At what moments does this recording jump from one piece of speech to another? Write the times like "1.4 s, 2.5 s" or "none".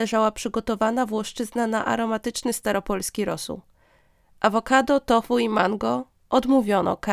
none

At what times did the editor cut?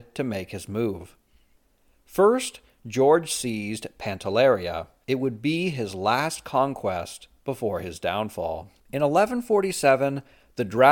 5.0 s, 8.8 s

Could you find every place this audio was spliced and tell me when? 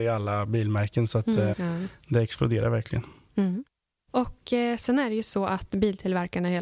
1.5 s

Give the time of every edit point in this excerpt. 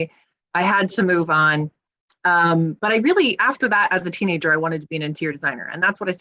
none

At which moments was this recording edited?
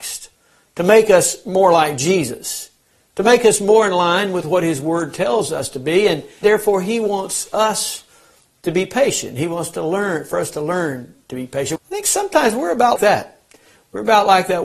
6.4 s, 11.8 s, 13.0 s

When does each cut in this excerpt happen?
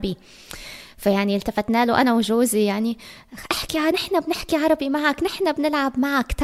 3.9 s

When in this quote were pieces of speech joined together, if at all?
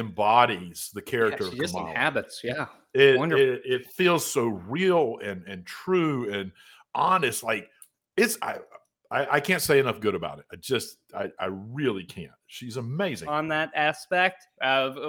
8.4 s, 13.2 s

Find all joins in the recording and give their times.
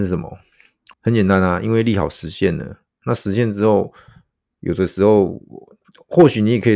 0.9 s, 3.0 s

